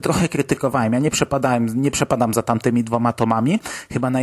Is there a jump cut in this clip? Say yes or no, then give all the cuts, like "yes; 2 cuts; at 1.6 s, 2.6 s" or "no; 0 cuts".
no; 0 cuts